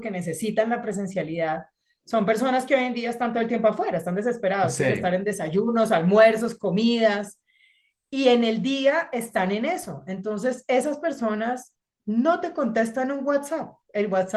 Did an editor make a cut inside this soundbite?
no; 0 cuts

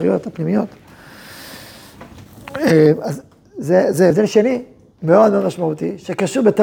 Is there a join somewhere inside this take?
yes; 1 cut; at 4.1 s

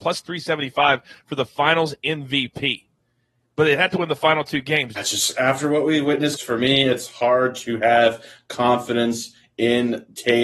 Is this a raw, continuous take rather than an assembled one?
no; 2 cuts; at 5.0 s, 6.4 s

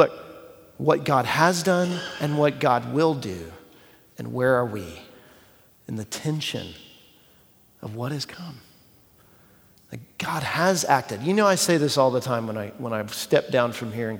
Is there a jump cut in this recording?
yes; 1 cut; at 5.8 s

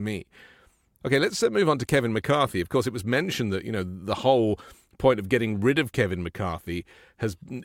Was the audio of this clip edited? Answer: yes; 1 cut; at 1.0 s

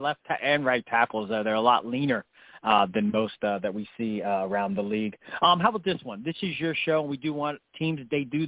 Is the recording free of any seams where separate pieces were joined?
yes; 0 cuts

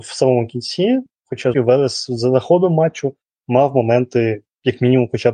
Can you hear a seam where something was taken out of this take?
yes; 1 cut; at 1.5 s

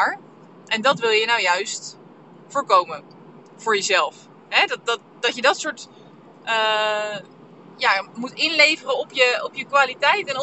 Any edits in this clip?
no; 0 cuts

